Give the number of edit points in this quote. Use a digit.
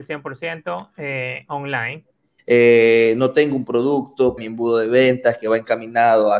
2